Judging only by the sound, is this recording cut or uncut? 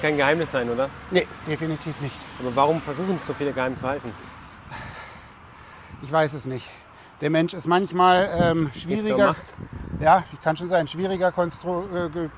uncut